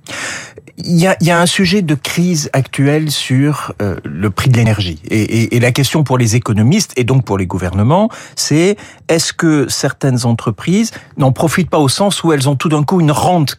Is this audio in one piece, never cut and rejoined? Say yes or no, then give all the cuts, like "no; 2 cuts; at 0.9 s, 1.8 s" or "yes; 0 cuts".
yes; 0 cuts